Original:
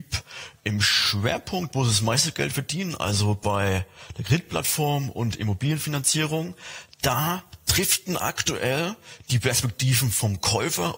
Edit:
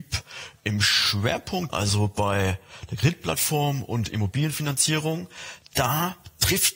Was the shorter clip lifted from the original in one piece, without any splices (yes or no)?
no